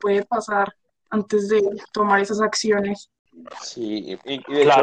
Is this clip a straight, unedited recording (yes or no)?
yes